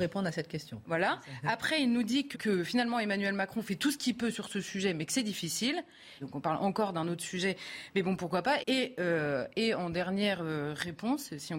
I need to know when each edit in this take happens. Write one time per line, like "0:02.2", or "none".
0:02.3
0:06.2
0:08.6